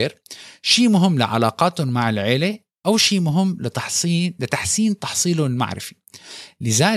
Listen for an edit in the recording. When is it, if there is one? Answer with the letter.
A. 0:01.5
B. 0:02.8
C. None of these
C